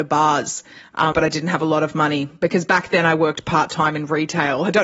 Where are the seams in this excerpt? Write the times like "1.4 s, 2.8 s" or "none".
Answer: 1.1 s